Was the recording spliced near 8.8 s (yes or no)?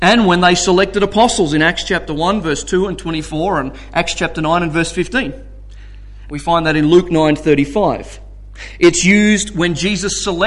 no